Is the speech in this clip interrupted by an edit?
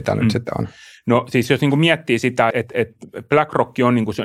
yes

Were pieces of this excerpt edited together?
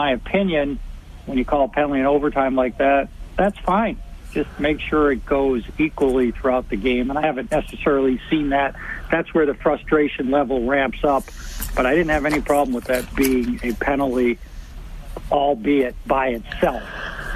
no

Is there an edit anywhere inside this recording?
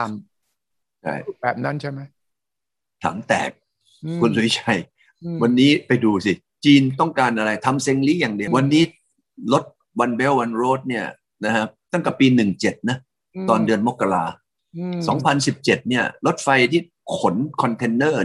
yes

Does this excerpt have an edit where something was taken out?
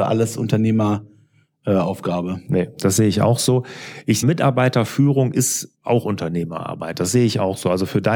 yes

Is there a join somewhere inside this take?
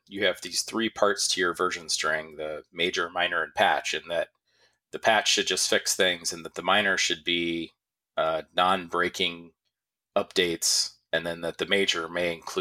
no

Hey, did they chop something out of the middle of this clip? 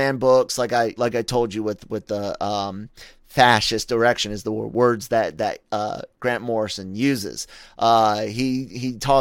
no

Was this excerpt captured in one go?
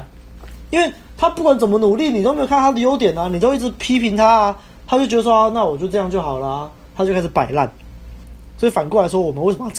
yes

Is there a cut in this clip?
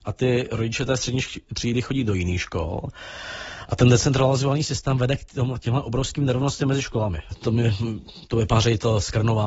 yes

